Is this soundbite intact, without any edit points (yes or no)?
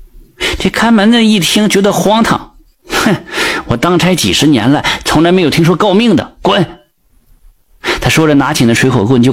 yes